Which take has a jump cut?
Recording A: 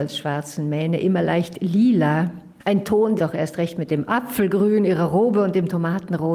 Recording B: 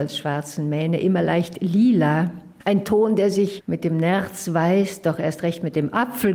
A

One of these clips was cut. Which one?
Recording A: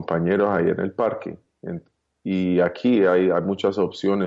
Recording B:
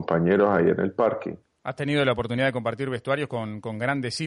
B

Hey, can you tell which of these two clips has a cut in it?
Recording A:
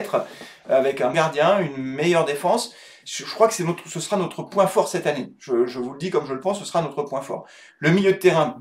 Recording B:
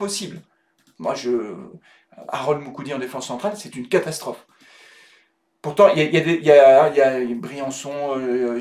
A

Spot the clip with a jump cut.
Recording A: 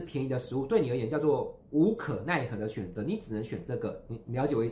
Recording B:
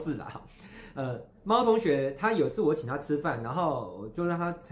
A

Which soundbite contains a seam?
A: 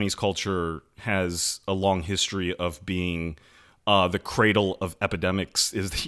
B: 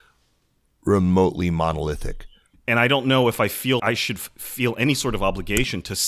B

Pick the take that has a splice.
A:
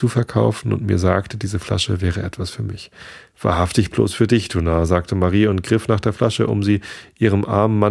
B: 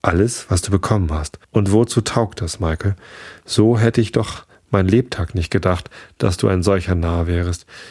B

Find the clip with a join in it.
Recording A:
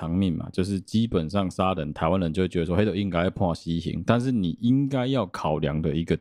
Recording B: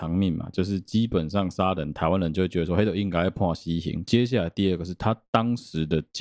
B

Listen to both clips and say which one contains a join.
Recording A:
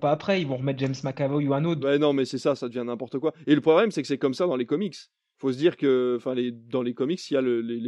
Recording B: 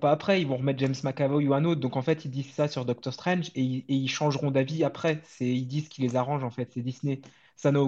A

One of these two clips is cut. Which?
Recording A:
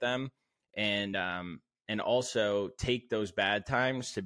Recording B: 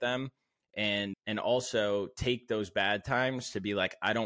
B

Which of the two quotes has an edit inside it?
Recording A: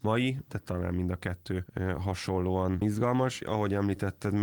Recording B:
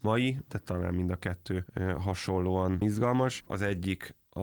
B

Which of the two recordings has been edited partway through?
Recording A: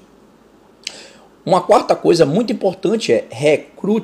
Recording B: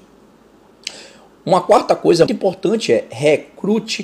B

